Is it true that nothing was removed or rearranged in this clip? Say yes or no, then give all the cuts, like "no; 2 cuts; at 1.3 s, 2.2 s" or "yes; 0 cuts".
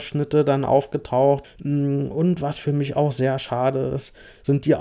no; 1 cut; at 1.4 s